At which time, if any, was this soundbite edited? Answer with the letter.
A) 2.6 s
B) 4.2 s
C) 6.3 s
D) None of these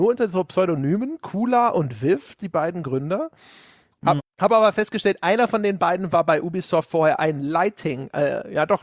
B